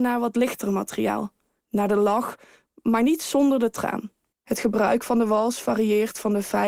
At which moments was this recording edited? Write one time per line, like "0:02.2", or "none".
0:01.6
0:04.3